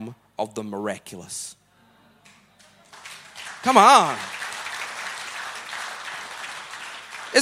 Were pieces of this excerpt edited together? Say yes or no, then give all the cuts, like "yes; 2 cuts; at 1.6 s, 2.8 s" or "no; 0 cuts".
no; 0 cuts